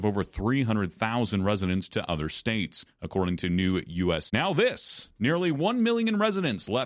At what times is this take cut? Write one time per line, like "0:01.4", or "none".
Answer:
0:04.3